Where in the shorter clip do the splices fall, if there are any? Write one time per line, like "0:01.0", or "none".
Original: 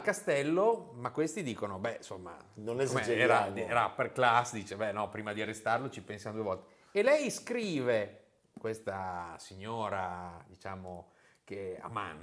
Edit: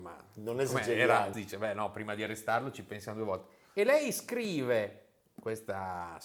0:01.3

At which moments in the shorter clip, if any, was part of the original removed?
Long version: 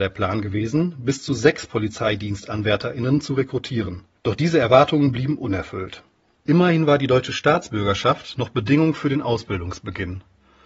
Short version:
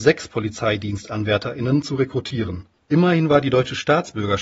0:02.7

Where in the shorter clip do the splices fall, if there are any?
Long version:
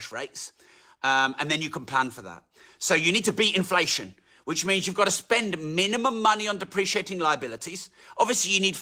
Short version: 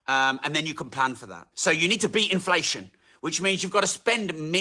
0:01.5

